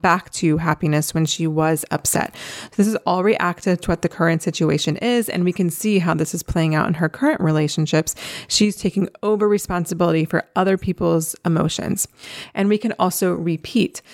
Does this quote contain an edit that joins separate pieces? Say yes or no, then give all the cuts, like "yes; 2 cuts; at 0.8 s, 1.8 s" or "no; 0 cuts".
no; 0 cuts